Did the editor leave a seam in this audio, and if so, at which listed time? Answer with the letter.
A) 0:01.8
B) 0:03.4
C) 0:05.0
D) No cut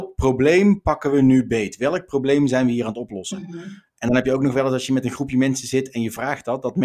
D